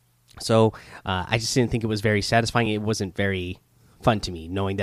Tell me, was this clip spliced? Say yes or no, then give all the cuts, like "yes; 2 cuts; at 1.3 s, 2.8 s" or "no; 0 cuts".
no; 0 cuts